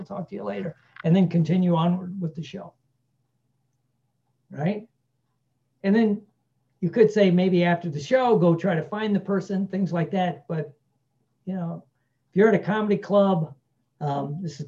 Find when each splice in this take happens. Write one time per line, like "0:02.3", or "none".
none